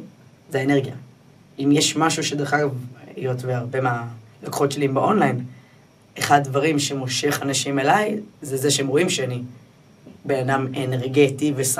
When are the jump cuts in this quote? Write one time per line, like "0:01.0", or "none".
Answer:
none